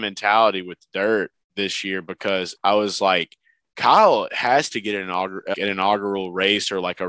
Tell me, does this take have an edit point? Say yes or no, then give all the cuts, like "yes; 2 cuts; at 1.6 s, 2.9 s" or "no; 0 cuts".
yes; 3 cuts; at 1.4 s, 2.6 s, 5.5 s